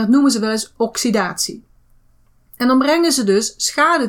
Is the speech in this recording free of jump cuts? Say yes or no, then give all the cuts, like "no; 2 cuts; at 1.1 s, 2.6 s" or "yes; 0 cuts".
yes; 0 cuts